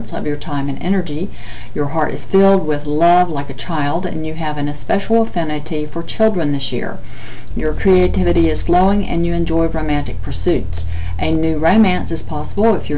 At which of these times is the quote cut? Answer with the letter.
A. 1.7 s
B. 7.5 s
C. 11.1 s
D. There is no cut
B